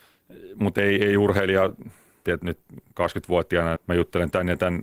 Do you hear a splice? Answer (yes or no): yes